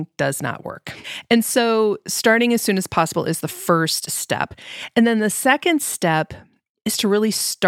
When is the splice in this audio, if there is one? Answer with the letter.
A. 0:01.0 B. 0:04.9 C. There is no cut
A